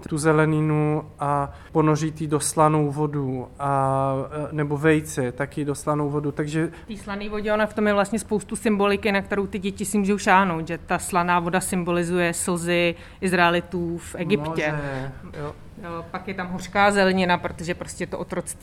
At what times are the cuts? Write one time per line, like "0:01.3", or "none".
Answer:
0:15.3